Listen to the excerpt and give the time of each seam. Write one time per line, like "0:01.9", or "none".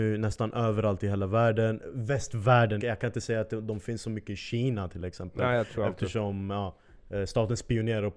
0:02.8